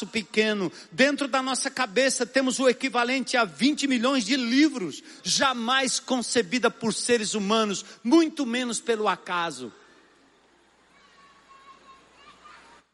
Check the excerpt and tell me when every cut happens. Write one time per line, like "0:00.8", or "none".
0:05.2